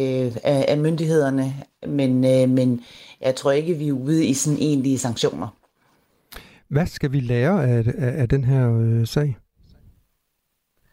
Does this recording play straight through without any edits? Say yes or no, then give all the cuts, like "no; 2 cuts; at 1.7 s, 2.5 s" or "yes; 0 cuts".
yes; 0 cuts